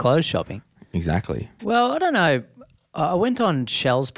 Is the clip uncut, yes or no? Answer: no